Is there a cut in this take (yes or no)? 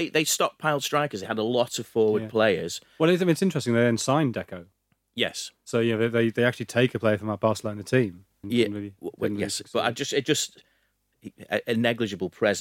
yes